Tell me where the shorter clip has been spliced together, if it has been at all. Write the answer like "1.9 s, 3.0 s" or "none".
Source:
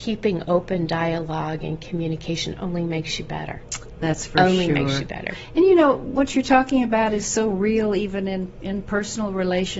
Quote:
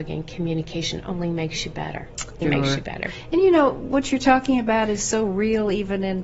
2.4 s